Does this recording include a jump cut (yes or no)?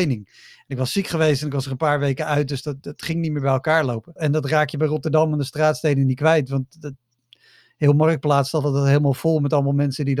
yes